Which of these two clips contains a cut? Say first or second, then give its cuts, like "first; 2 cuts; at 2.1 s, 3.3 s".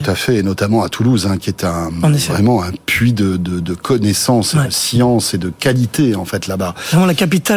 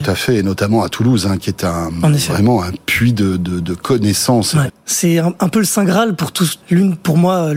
second; 2 cuts; at 4.7 s, 6.6 s